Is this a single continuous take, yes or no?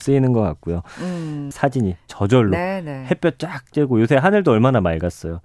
no